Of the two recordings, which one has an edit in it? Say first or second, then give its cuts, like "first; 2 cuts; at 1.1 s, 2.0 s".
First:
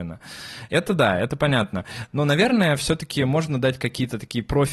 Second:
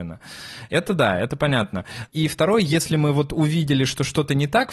second; 1 cut; at 2.1 s